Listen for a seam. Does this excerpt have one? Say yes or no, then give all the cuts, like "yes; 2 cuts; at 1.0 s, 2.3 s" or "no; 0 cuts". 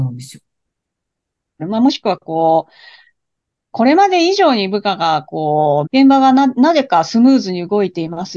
yes; 2 cuts; at 1.6 s, 5.8 s